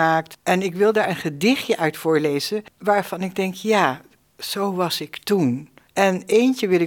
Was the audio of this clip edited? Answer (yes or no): yes